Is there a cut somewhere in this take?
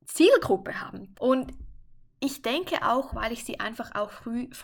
yes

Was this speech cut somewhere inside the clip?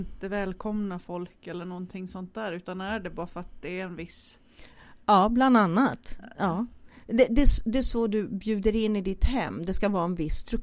no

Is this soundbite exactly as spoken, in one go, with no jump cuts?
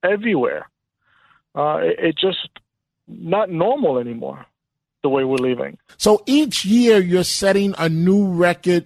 no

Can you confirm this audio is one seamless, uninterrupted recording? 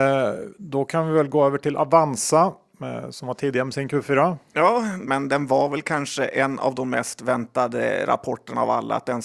no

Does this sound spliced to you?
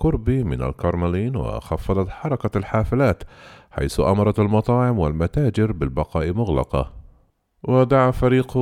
no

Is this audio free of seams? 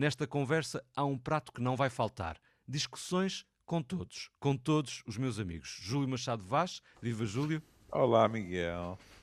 yes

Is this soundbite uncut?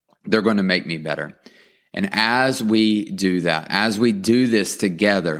no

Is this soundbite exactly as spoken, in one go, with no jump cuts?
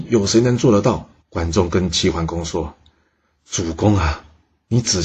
no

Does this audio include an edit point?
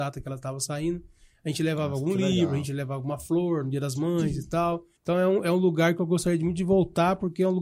yes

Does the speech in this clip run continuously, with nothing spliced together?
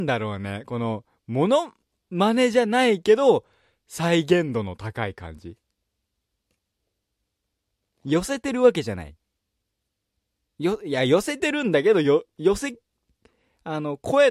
yes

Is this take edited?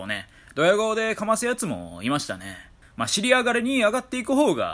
yes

